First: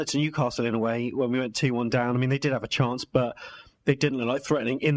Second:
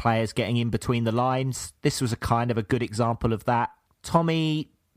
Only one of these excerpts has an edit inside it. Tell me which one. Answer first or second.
second